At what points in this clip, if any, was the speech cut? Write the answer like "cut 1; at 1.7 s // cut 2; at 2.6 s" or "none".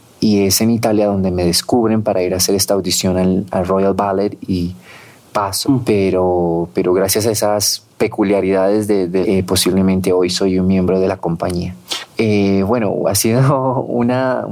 cut 1; at 5.6 s // cut 2; at 9.2 s // cut 3; at 12.1 s